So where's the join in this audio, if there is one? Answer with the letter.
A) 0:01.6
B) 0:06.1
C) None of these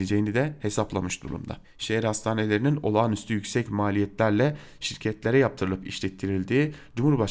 A